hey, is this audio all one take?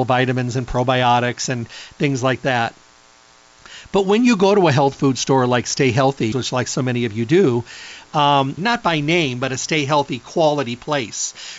no; 2 cuts; at 6.3 s, 8.6 s

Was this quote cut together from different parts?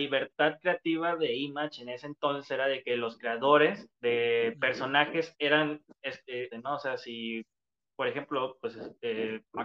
yes; 2 cuts; at 3.9 s, 6.5 s

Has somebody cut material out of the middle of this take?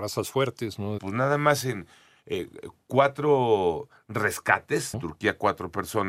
yes; 2 cuts; at 1.0 s, 4.9 s

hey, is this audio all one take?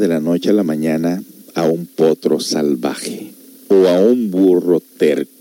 yes; 0 cuts

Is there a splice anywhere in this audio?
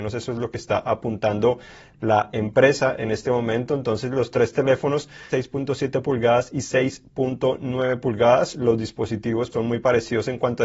yes; 2 cuts; at 5.3 s, 9.5 s

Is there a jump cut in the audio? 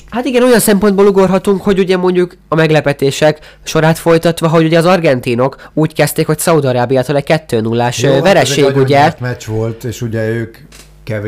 no; 0 cuts

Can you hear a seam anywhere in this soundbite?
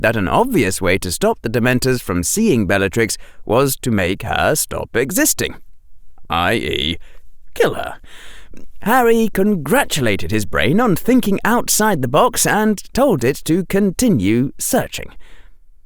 no; 0 cuts

